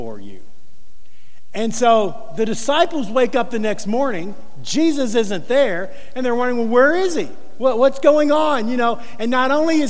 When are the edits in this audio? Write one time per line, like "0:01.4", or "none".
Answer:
none